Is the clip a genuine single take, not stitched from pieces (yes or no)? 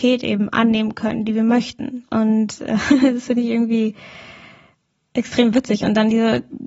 no